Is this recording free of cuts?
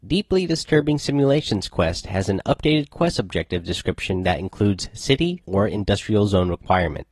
no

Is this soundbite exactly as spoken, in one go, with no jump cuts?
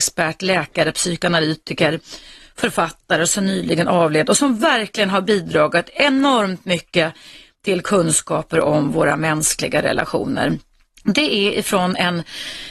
yes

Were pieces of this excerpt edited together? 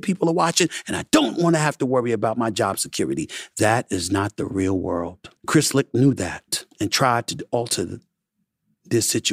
yes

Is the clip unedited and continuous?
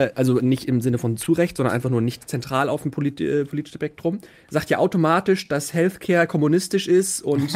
yes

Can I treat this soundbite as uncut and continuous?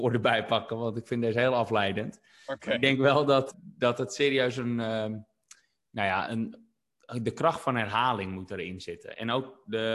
no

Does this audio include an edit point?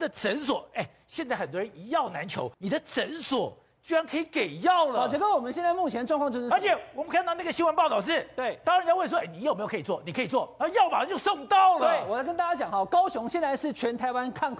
yes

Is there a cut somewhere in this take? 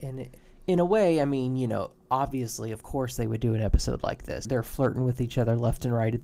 no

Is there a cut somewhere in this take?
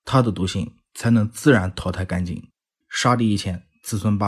yes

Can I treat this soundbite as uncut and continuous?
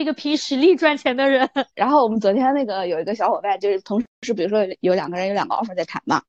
no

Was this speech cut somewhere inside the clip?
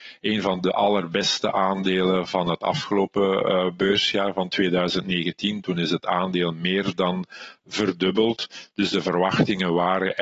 no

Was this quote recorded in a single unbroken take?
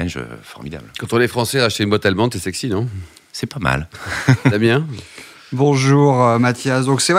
yes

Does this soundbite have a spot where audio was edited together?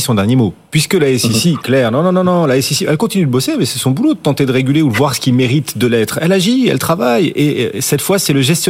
no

